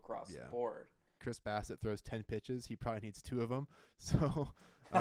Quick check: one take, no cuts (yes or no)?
no